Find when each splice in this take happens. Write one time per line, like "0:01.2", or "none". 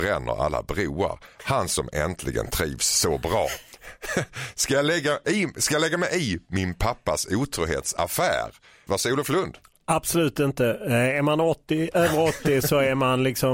0:08.9